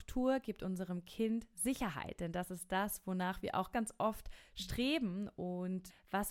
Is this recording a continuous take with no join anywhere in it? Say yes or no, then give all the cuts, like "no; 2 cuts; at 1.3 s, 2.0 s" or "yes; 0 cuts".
no; 1 cut; at 3.7 s